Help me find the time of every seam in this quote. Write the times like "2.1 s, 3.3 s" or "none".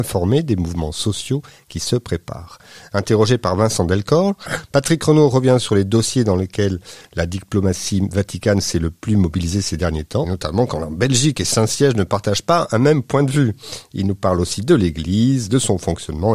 10.2 s